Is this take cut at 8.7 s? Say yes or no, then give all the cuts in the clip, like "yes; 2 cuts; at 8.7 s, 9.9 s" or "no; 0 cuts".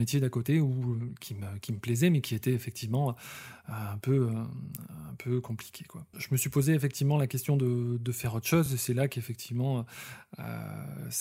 no; 0 cuts